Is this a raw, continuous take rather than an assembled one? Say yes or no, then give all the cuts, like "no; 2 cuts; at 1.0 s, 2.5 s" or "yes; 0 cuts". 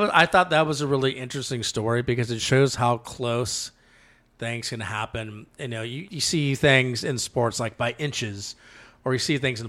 no; 1 cut; at 6.1 s